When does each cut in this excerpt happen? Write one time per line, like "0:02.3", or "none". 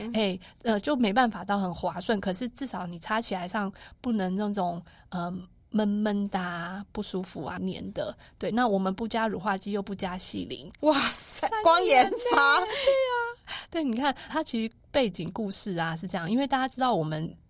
0:07.6
0:10.8
0:14.3